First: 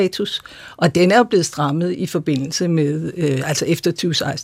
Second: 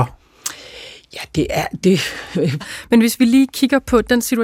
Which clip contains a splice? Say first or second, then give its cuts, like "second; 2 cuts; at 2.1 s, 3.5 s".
second; 1 cut; at 2.6 s